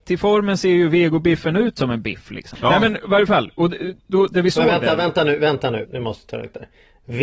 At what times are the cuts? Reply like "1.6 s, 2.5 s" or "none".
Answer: 2.5 s, 5.8 s